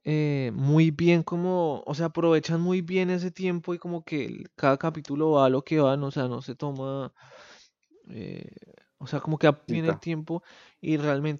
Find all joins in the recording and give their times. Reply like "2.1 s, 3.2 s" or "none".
9.7 s